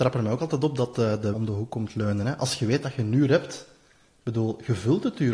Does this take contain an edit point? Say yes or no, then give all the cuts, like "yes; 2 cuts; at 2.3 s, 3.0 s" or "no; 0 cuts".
yes; 1 cut; at 1.3 s